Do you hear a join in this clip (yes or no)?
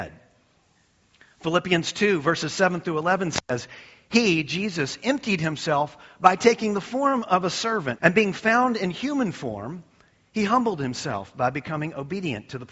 yes